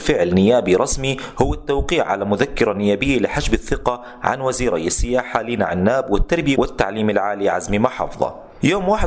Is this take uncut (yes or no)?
no